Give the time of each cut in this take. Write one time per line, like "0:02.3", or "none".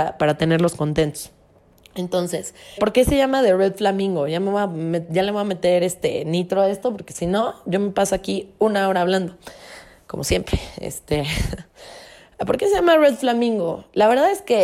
0:02.8